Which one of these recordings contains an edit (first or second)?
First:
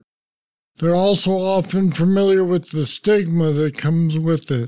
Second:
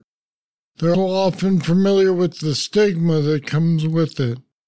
second